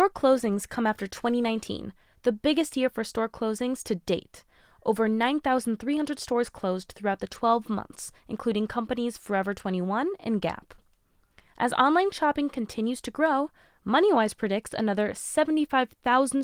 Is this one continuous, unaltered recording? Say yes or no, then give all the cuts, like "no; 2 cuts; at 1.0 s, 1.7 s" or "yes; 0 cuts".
yes; 0 cuts